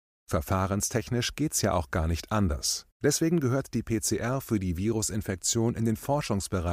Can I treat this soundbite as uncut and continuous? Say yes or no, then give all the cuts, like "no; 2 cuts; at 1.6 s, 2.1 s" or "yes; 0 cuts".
no; 1 cut; at 2.9 s